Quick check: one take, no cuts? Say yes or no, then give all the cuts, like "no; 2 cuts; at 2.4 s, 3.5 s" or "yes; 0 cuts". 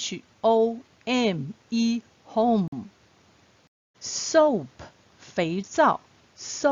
no; 1 cut; at 3.9 s